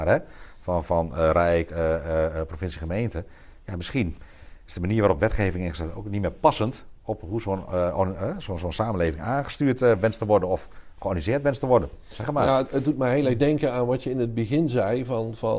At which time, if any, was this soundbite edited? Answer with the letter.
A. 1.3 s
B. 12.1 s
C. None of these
C